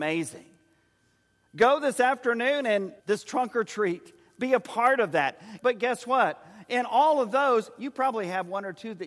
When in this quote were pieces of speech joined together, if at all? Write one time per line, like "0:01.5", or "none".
0:03.0
0:05.6